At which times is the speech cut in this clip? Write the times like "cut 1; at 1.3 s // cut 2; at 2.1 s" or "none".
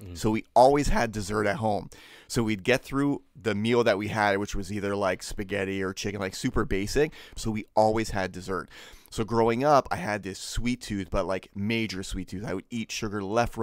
cut 1; at 7.4 s